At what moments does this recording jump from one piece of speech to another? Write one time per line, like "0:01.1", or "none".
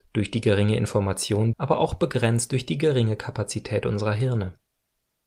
0:01.5

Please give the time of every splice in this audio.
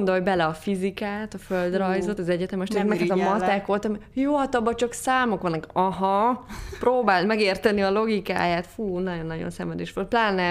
none

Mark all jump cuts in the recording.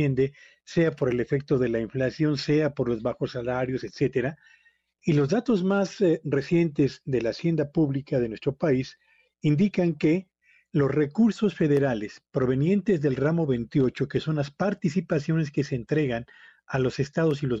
0:05.0

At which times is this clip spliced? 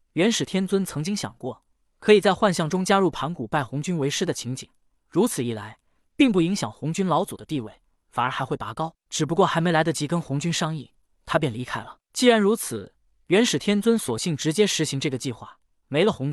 none

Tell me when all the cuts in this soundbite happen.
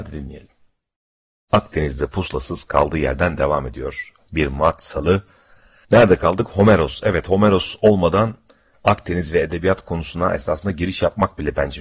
none

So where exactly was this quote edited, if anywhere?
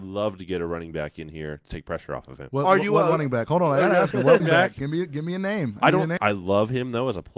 0:04.4
0:06.2

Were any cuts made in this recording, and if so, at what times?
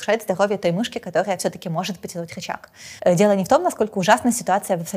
0:03.0

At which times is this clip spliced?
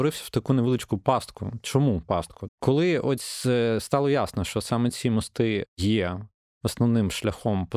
0:02.5

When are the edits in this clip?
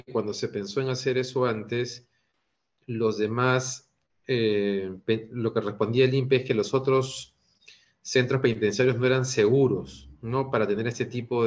none

